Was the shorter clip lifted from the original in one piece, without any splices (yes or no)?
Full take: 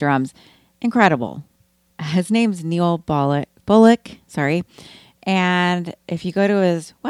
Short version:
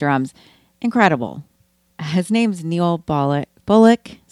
yes